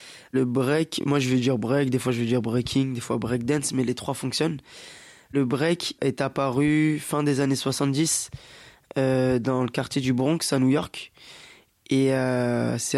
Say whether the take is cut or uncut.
uncut